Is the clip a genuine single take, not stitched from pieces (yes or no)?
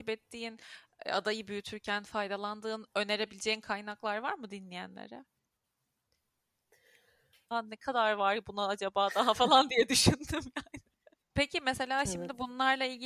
no